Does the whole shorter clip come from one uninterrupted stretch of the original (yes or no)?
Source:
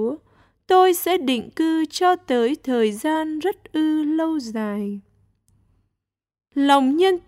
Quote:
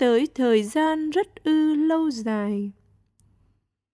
yes